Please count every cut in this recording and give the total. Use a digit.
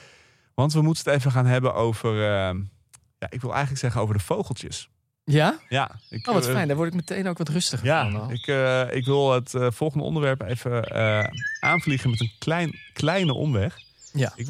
0